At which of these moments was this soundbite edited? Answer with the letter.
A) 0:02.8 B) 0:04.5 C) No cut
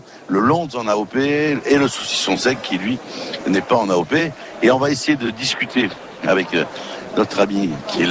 C